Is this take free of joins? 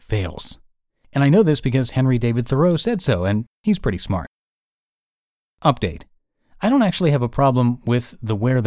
yes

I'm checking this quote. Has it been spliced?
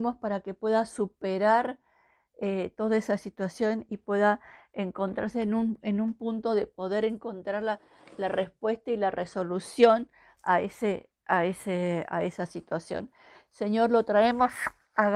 no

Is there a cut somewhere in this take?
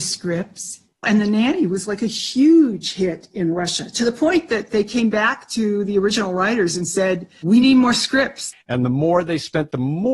yes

